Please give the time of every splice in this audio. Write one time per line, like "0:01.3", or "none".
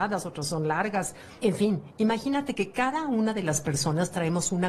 none